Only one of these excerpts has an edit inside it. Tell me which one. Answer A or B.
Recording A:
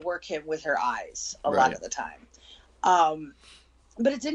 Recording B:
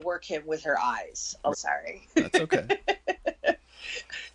B